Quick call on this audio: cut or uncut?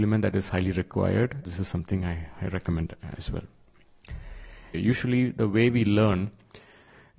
cut